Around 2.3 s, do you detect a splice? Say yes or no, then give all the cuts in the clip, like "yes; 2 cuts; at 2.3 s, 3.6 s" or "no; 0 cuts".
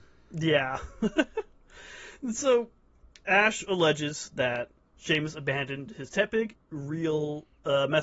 no; 1 cut; at 6.5 s